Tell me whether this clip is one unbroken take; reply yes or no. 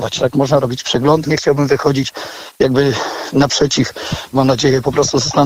no